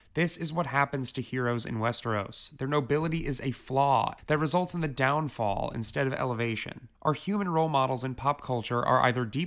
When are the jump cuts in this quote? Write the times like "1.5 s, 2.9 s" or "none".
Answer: 4.2 s, 6.9 s